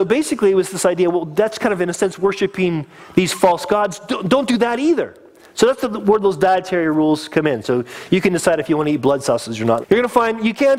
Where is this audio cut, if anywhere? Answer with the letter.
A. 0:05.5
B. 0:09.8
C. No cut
B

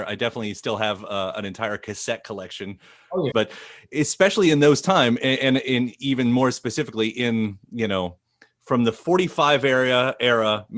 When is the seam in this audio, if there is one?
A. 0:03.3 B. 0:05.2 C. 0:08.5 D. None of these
A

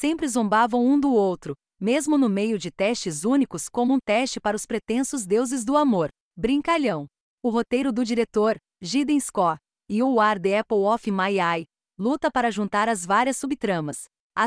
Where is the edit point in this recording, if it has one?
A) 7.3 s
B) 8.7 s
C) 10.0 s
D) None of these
A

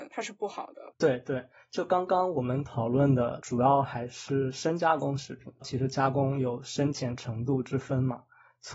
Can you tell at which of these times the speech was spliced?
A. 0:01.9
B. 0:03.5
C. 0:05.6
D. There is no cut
C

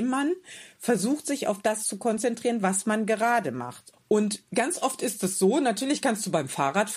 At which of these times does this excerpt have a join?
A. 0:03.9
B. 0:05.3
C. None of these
A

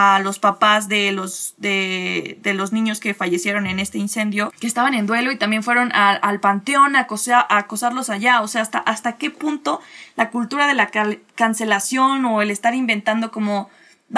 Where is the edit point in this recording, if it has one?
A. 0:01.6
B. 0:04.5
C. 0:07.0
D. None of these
B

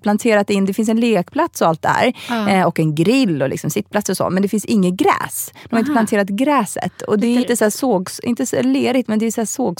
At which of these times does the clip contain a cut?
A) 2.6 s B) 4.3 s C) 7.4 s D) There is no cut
C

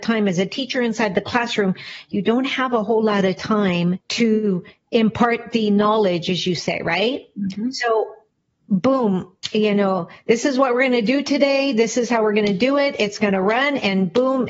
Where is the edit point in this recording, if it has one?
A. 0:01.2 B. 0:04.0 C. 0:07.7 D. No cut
B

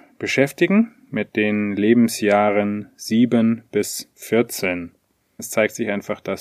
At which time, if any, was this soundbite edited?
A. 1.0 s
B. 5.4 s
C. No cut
B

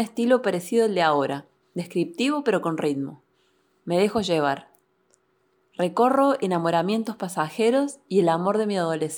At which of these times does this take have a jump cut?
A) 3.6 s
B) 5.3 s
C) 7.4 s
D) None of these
D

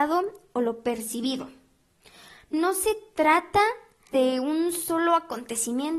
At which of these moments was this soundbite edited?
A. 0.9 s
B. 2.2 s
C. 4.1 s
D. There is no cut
C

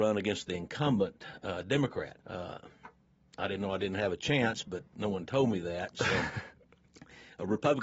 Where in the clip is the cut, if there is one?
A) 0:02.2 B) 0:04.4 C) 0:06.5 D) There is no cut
A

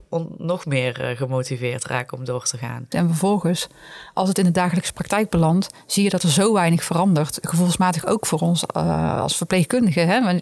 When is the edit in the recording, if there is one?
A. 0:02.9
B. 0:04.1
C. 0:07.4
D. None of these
A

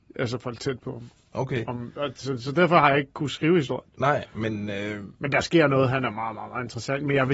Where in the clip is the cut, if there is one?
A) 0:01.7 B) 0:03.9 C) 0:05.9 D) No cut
D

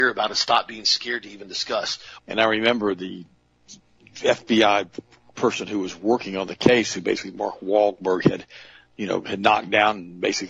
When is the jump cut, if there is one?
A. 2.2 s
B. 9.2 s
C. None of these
A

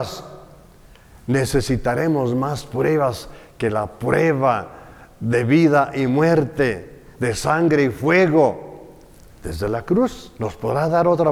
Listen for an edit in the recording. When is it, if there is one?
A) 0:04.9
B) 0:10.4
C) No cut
B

